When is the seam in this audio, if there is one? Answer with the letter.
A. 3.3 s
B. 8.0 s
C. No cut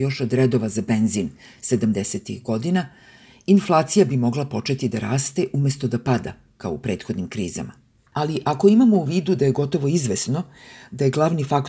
B